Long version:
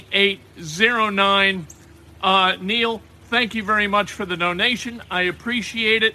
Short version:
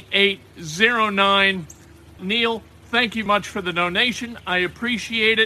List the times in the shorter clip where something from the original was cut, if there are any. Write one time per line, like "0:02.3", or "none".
0:02.2
0:03.3